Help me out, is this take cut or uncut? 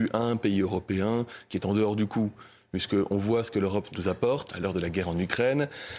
cut